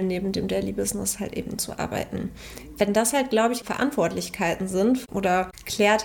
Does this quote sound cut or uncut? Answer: cut